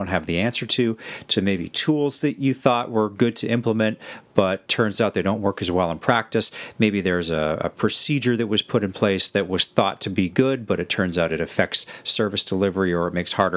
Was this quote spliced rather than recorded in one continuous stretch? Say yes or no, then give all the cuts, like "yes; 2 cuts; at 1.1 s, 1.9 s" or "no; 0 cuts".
no; 0 cuts